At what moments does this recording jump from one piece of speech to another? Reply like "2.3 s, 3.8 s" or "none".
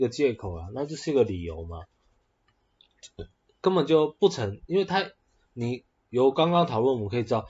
none